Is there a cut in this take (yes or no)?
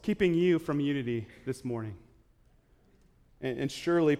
yes